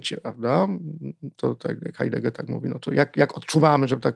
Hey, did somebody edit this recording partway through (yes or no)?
no